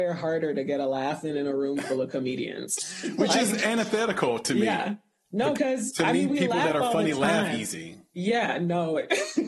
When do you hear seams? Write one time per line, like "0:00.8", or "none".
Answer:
0:05.5